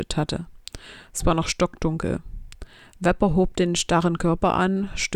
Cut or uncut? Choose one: uncut